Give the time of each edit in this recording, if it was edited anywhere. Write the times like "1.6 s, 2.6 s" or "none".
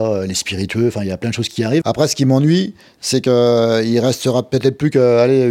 1.8 s

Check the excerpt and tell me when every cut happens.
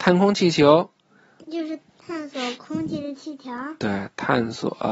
1.8 s

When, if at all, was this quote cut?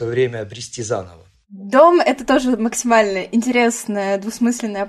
1.3 s

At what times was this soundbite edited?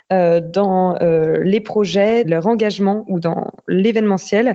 2.2 s

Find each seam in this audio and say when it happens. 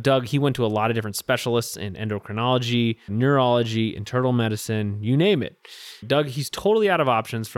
3.1 s, 6.0 s

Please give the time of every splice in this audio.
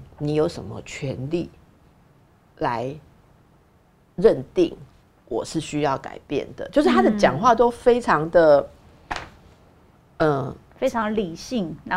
none

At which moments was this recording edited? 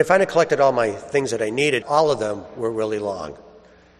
1.8 s

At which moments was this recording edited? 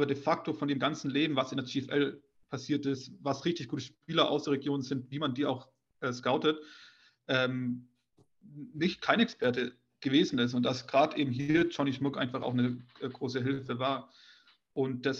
none

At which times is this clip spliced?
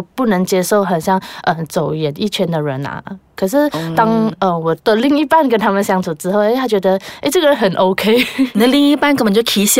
none

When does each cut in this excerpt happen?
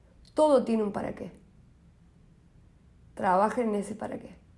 none

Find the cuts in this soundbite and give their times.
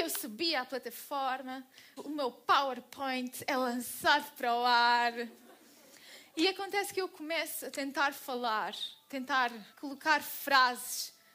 2.0 s, 9.7 s

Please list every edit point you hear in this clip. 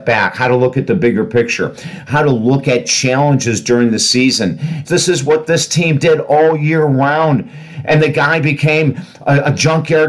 4.8 s

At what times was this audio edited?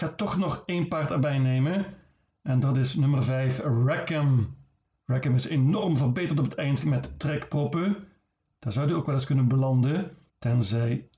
6.8 s, 8.6 s

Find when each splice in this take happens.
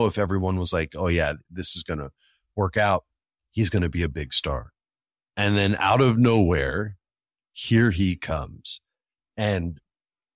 none

